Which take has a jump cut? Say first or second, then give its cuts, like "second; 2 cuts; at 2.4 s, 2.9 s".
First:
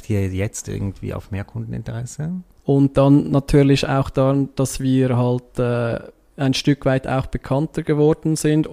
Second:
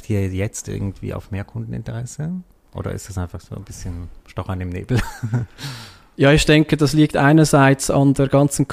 first; 1 cut; at 2.6 s